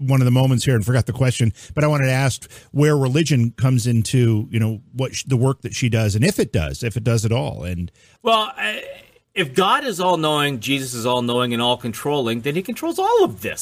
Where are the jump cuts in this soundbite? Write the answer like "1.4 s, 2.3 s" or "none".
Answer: none